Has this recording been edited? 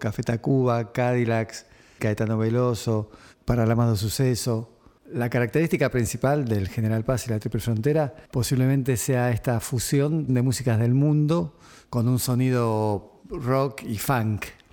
yes; 3 cuts; at 2.0 s, 5.0 s, 8.3 s

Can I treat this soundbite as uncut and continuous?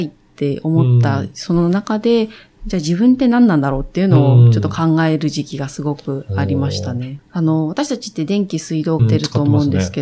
no; 2 cuts; at 7.2 s, 9.0 s

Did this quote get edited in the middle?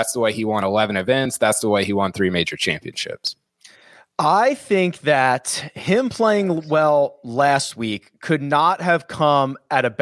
no; 0 cuts

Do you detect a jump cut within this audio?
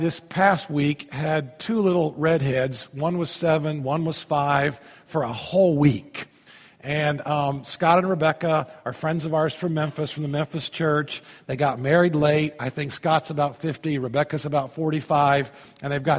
no; 0 cuts

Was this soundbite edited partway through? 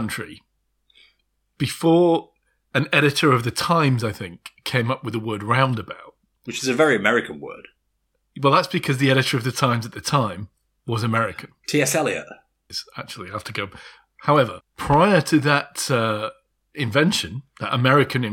yes; 2 cuts; at 12.7 s, 14.6 s

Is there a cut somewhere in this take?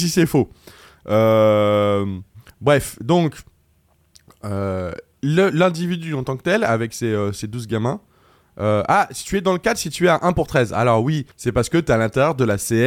yes; 1 cut; at 11.3 s

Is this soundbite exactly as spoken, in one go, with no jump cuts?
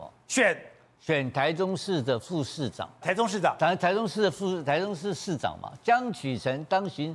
no; 1 cut; at 3.0 s

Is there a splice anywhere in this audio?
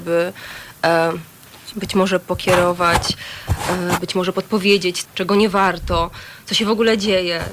yes; 2 cuts; at 1.7 s, 5.1 s

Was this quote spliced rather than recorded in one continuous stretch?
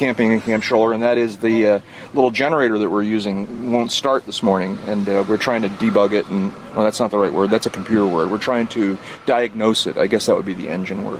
no; 0 cuts

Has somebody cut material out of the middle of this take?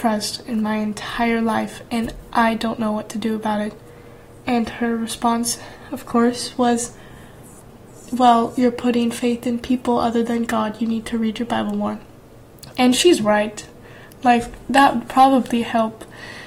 no; 0 cuts

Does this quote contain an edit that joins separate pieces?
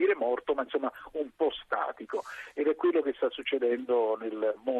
no; 0 cuts

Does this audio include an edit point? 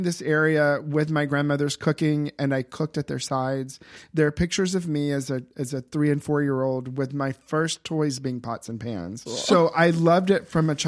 yes; 1 cut; at 9.3 s

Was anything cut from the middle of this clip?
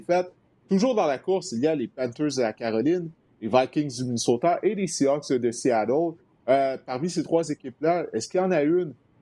no; 0 cuts

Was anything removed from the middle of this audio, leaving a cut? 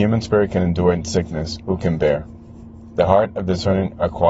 yes; 1 cut; at 1.6 s

